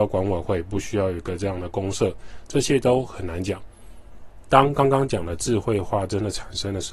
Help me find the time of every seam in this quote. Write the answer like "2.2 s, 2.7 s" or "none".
none

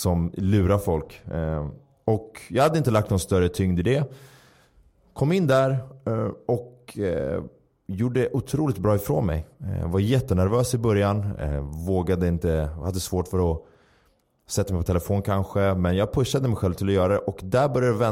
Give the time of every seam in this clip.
none

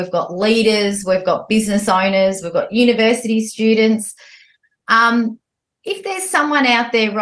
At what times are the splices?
none

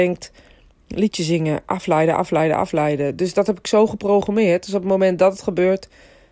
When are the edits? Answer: none

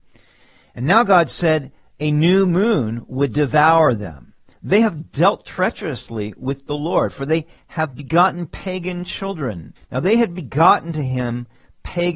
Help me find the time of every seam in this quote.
4.5 s, 9.8 s

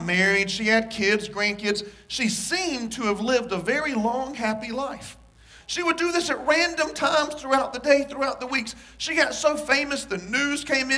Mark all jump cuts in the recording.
5.6 s

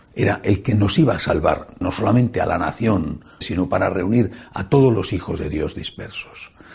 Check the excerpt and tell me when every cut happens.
1.8 s, 3.4 s

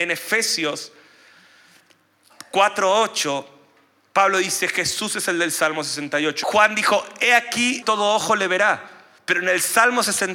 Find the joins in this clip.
6.4 s, 7.8 s

